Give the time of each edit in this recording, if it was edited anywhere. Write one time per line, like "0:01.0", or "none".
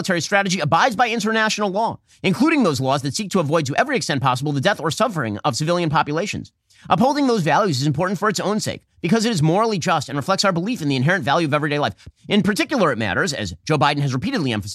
0:12.1